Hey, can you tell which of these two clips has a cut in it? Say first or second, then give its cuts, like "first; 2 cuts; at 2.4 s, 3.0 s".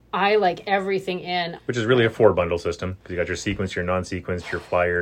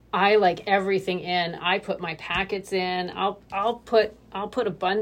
first; 1 cut; at 1.6 s